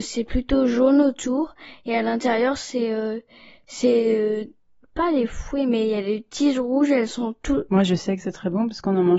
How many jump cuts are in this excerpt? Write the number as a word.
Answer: one